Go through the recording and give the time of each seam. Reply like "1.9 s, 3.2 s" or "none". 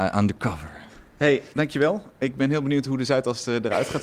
1.5 s